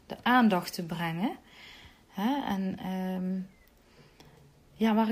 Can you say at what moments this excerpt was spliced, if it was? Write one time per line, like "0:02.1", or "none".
none

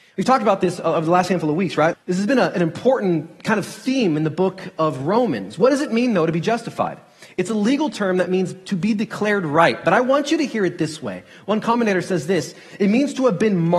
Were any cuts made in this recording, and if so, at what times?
0:01.9

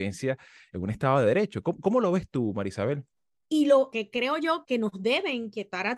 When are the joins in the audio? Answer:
0:03.3
0:04.7

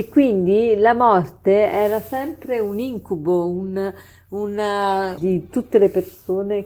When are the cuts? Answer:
0:05.2

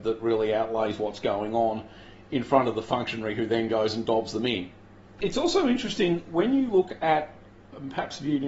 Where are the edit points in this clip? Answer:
0:05.1

